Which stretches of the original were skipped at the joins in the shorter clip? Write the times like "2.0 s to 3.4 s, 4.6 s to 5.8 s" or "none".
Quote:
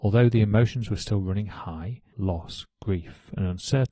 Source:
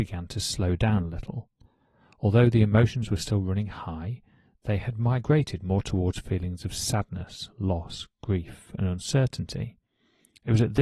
4.3 s to 7.5 s